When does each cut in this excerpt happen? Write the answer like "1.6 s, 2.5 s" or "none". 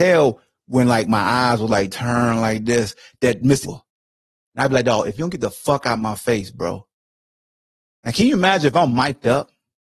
3.6 s